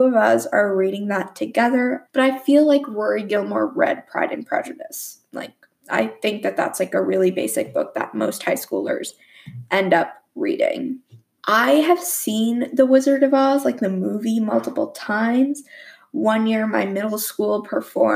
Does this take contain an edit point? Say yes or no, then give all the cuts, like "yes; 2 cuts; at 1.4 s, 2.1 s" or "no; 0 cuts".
yes; 2 cuts; at 2.1 s, 11.4 s